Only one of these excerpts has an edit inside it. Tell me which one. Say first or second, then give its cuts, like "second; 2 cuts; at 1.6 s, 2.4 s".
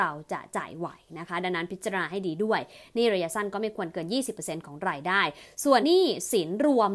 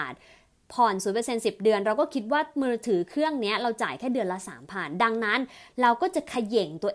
first; 1 cut; at 5.8 s